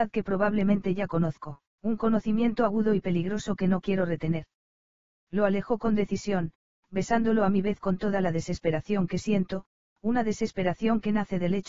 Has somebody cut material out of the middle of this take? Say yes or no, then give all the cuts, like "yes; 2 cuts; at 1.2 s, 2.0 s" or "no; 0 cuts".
yes; 1 cut; at 1.7 s